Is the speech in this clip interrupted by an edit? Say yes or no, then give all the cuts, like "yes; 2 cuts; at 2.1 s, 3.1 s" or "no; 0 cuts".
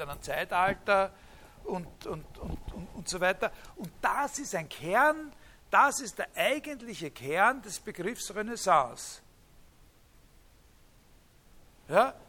no; 0 cuts